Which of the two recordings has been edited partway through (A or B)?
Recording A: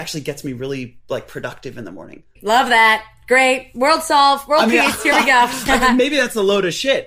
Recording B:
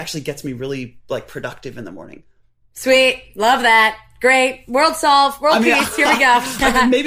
A